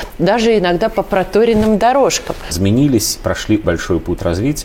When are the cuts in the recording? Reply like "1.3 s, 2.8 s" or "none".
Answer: 2.5 s, 3.6 s